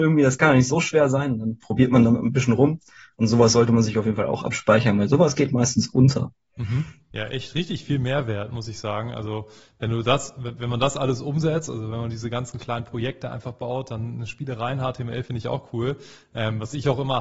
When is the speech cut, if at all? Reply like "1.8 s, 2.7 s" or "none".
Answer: 7.1 s

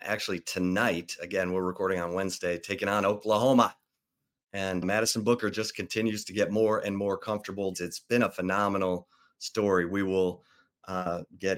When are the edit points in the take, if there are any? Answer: 4.8 s, 7.7 s

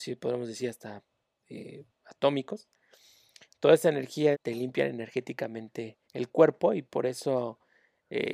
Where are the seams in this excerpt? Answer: 4.3 s, 6.0 s

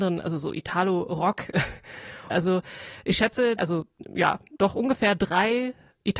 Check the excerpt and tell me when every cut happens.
2.3 s, 3.6 s

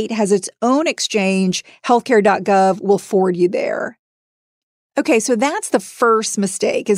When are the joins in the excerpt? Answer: none

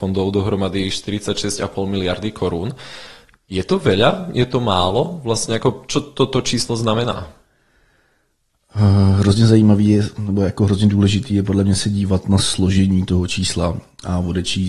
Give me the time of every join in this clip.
none

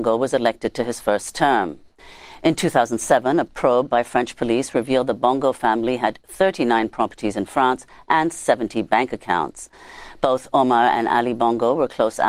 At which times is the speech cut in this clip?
none

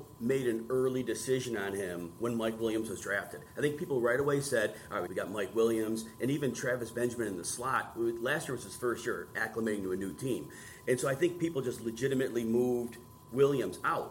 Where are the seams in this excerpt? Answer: 5.1 s

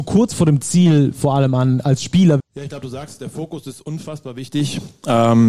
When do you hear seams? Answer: 2.4 s

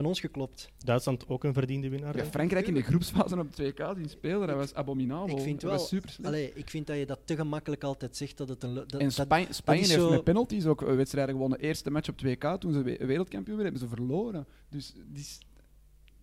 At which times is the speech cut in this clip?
15.0 s

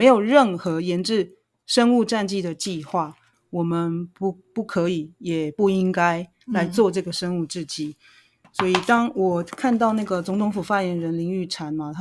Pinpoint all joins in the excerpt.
3.3 s

